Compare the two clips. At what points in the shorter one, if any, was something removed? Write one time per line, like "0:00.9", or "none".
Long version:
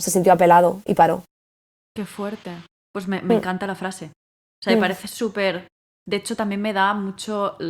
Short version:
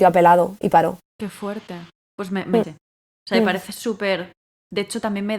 0:01.1
0:02.6